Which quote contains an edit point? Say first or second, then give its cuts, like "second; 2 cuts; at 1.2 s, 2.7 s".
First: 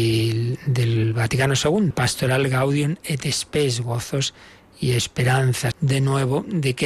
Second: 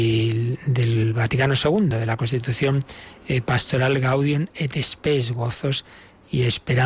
first; 2 cuts; at 1.9 s, 5.7 s